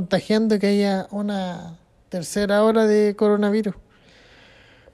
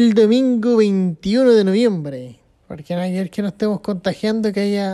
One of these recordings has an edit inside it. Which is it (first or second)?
second